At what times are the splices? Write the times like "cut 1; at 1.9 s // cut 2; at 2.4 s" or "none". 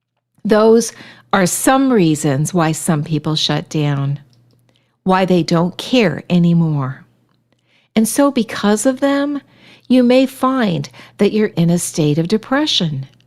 cut 1; at 11.5 s